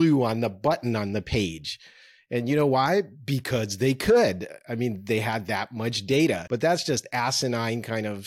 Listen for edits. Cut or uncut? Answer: cut